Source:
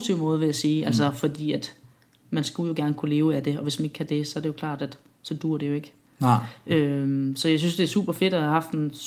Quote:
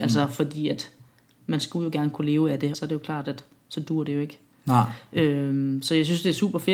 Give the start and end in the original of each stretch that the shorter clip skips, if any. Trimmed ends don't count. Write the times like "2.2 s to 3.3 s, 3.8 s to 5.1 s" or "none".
3.6 s to 4.3 s